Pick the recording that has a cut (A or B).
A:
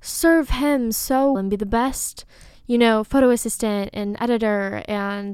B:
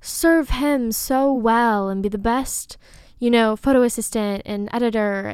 A